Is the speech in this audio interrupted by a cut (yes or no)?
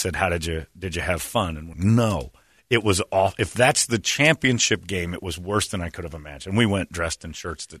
yes